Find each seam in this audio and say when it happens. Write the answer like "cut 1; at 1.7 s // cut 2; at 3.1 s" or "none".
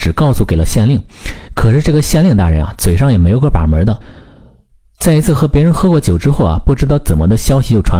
none

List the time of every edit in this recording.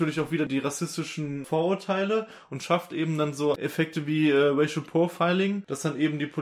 none

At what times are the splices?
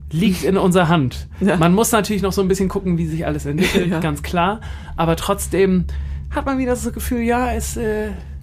none

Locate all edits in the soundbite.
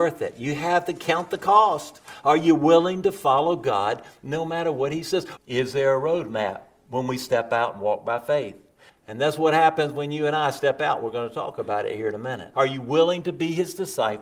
cut 1; at 5.4 s // cut 2; at 8.9 s // cut 3; at 12.5 s

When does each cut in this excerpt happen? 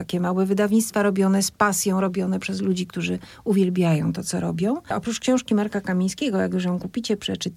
none

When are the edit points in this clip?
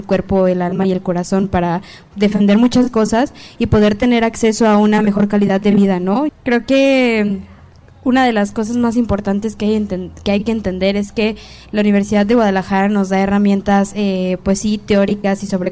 cut 1; at 6.3 s

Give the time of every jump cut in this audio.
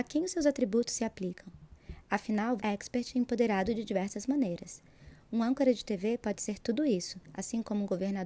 cut 1; at 2.6 s

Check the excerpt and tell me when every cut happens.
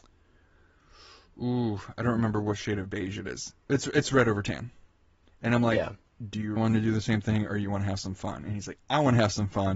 cut 1; at 6.6 s

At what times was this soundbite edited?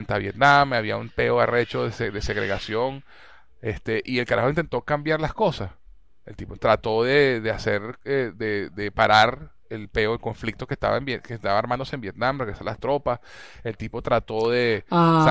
cut 1; at 6.6 s

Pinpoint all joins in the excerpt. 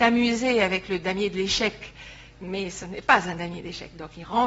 none

